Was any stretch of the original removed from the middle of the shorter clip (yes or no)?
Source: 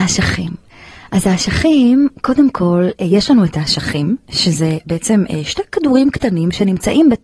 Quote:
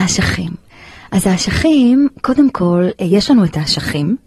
no